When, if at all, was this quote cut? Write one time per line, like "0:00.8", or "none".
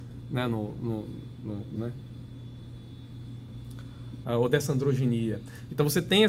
0:01.8
0:04.2